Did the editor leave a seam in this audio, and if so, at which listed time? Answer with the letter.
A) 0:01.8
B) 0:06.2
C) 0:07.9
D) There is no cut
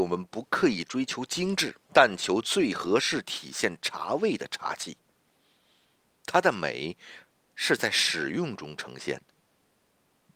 A